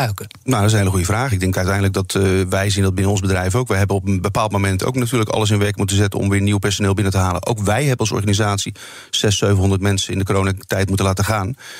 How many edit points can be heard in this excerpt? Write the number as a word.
zero